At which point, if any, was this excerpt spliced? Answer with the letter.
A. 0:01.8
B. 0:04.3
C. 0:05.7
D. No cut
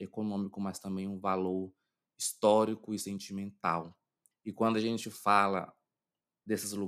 B